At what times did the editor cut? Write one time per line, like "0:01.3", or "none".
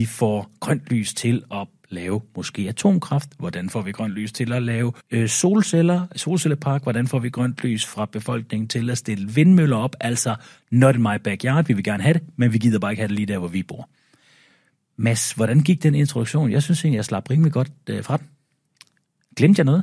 0:05.0